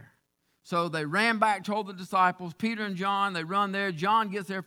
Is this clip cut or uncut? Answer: uncut